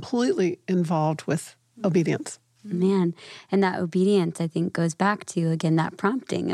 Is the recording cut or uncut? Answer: uncut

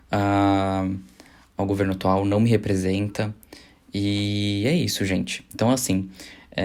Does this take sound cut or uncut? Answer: uncut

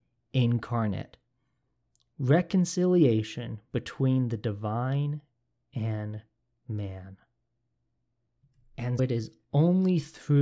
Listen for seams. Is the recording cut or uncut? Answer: cut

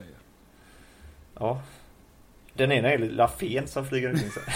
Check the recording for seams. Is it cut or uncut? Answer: uncut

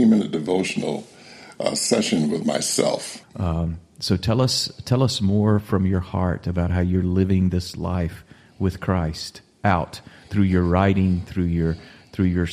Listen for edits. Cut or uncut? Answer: cut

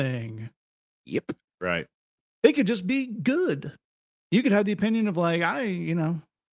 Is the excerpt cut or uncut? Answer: uncut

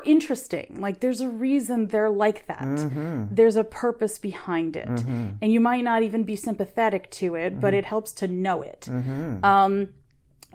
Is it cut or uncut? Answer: uncut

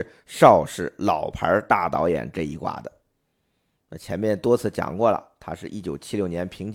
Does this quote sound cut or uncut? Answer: uncut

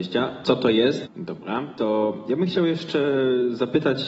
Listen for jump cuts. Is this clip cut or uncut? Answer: cut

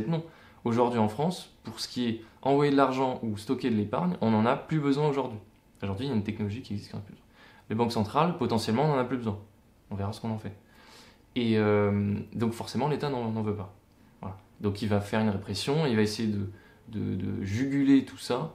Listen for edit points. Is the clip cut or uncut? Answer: uncut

